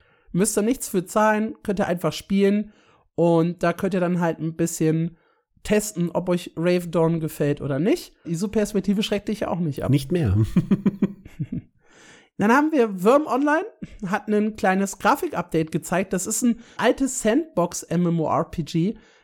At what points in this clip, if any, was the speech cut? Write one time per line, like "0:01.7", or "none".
0:08.2
0:16.8